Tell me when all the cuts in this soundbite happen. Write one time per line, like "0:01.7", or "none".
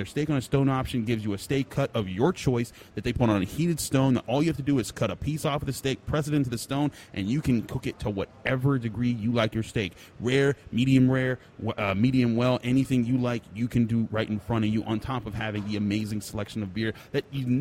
none